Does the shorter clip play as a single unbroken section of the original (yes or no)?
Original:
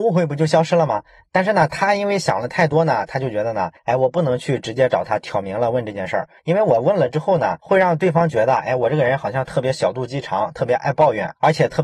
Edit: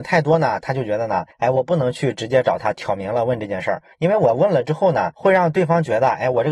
yes